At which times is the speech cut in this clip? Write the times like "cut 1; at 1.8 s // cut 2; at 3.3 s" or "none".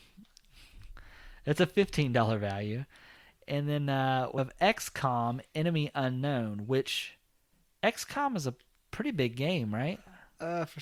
cut 1; at 4.4 s